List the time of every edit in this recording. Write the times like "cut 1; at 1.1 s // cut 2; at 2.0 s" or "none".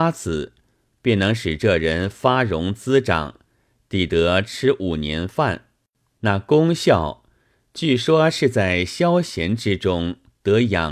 cut 1; at 6.1 s

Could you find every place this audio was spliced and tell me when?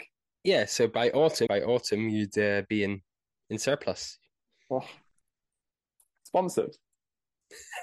cut 1; at 1.5 s

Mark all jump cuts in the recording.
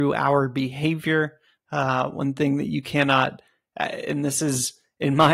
cut 1; at 1.6 s

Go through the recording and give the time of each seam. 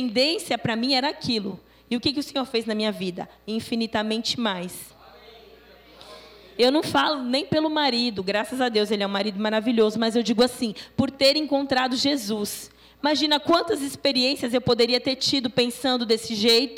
none

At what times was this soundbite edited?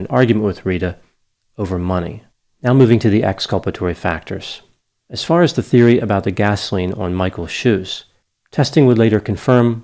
none

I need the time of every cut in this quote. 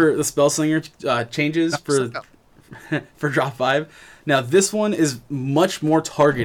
none

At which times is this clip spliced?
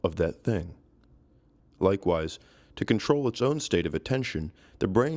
cut 1; at 1.6 s

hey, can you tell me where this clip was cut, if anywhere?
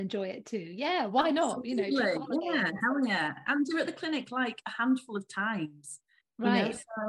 none

